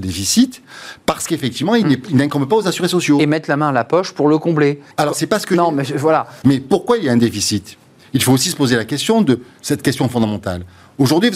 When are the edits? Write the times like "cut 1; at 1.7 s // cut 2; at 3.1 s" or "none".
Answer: cut 1; at 4.9 s // cut 2; at 6.4 s

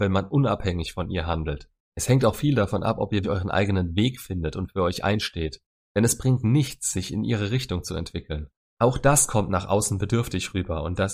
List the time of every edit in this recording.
cut 1; at 3.2 s

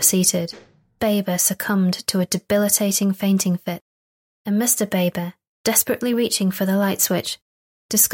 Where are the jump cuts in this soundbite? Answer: cut 1; at 1.0 s

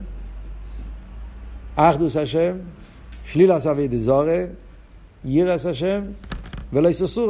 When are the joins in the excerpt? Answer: cut 1; at 5.2 s

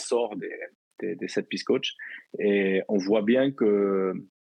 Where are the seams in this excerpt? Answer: none

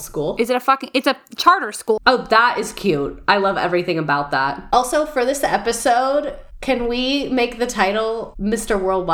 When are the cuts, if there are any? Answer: cut 1; at 2.0 s

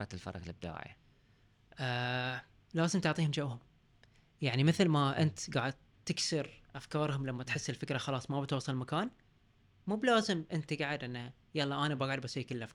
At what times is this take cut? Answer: none

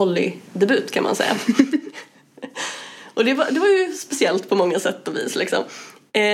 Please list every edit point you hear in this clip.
none

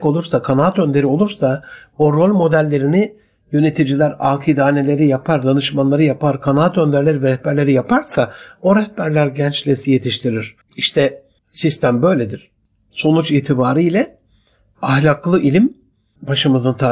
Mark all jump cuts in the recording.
cut 1; at 10.6 s

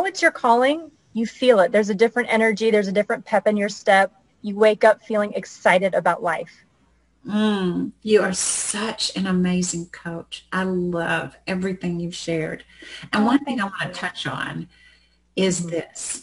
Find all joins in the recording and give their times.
none

